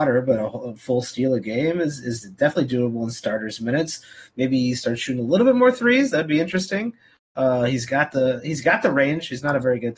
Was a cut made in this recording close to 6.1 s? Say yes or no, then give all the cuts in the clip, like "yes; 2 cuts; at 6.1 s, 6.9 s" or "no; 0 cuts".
no; 0 cuts